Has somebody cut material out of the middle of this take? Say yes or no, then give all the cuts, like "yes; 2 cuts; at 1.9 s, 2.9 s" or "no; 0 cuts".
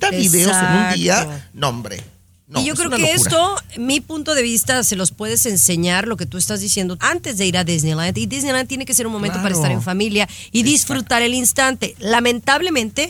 yes; 1 cut; at 7.0 s